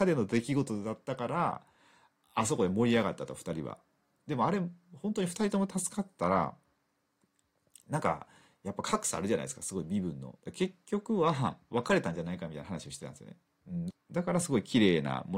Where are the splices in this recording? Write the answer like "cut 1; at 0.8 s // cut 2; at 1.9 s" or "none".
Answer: cut 1; at 10.4 s // cut 2; at 13.9 s